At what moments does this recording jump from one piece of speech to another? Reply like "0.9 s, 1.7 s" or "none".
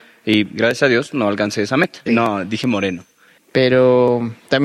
2.1 s, 3.4 s